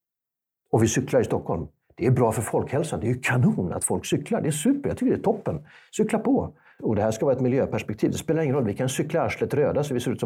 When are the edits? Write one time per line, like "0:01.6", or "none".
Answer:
0:06.8